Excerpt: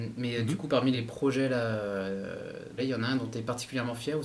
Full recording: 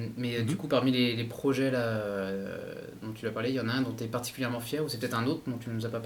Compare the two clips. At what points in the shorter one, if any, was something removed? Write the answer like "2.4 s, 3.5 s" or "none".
0.9 s, 2.8 s